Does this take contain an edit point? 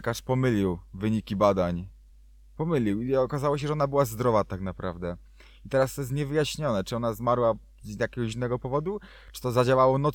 no; 0 cuts

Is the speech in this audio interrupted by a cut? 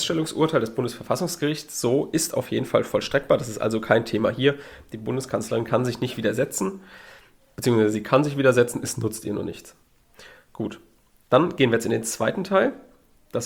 no; 0 cuts

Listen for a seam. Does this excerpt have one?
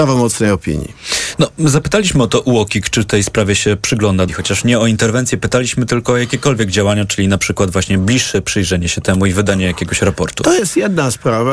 yes; 1 cut; at 4.3 s

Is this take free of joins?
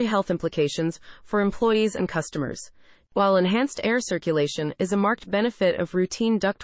no; 1 cut; at 3.1 s

